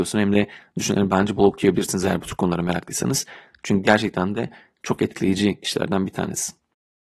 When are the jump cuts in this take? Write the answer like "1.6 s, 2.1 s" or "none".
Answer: 1.4 s